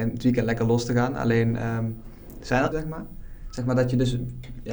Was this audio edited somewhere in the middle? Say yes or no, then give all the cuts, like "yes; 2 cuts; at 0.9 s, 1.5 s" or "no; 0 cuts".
yes; 1 cut; at 2.7 s